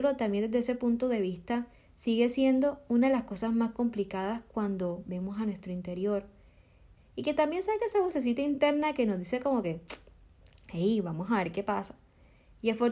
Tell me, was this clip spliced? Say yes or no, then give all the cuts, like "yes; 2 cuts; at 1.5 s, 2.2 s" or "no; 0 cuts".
yes; 1 cut; at 7.0 s